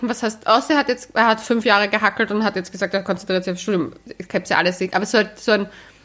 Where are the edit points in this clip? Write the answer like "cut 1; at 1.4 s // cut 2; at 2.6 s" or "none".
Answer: none